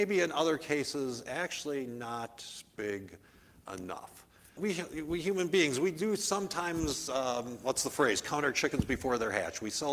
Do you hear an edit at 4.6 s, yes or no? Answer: yes